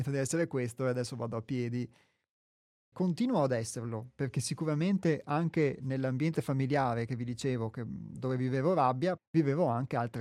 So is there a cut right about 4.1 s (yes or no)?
no